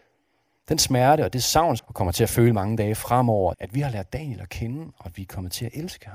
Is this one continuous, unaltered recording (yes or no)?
no